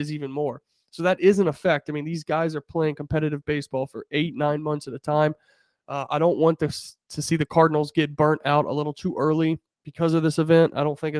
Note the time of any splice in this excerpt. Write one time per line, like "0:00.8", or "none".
none